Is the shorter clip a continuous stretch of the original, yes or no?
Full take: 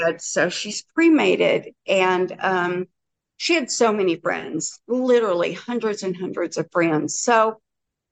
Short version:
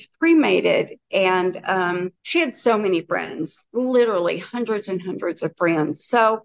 no